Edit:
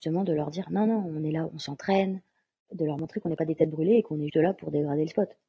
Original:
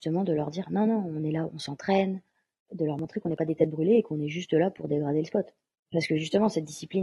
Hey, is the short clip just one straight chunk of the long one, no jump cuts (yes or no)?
no